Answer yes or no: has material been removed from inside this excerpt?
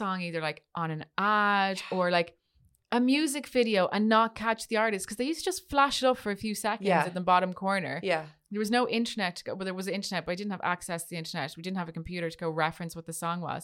no